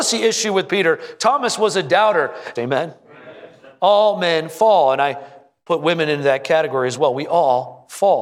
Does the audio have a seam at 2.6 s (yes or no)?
yes